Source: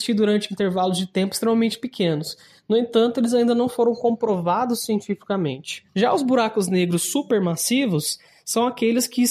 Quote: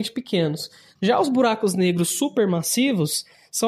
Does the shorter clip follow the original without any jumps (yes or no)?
no